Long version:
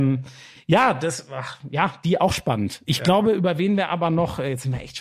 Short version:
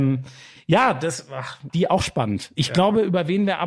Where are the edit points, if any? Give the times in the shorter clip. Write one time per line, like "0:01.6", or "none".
0:01.7